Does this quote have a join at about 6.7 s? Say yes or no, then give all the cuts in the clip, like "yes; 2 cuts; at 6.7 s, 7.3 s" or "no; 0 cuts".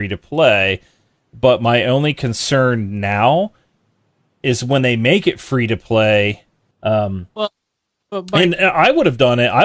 yes; 1 cut; at 6.7 s